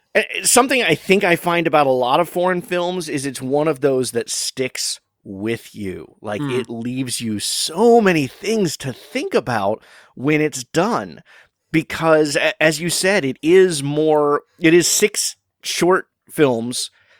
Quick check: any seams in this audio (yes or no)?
no